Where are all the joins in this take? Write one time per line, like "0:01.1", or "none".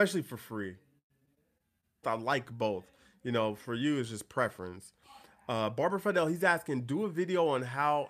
0:02.0